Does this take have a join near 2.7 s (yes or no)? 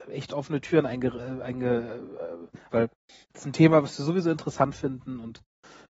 yes